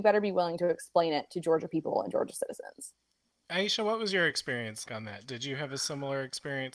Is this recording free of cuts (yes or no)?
no